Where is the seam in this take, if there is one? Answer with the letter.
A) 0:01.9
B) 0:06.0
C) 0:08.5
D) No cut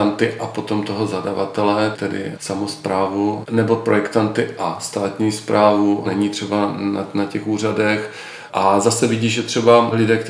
B